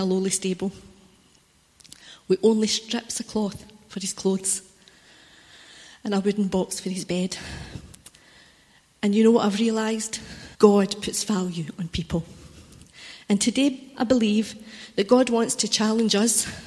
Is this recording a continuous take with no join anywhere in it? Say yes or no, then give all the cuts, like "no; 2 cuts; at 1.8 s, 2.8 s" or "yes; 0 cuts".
no; 1 cut; at 10.5 s